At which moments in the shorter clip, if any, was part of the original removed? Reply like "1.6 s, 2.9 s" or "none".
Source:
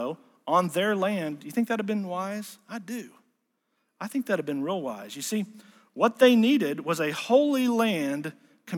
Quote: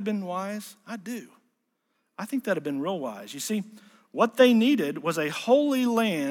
none